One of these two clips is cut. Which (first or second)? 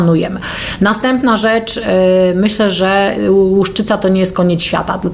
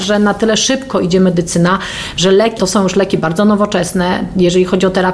second